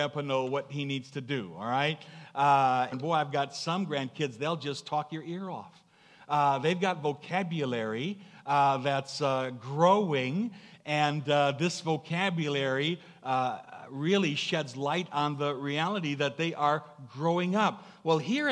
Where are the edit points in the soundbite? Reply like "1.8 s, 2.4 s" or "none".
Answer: 2.9 s